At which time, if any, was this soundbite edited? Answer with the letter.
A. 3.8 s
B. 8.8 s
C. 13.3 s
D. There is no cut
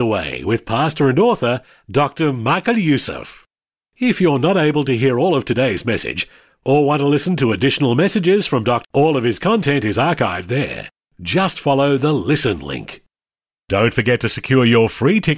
B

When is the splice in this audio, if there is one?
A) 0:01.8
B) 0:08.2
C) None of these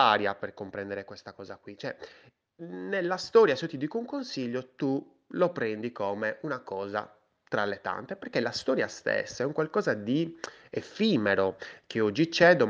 C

